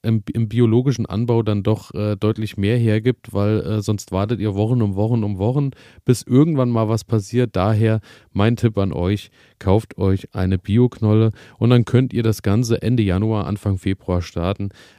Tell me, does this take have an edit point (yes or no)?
no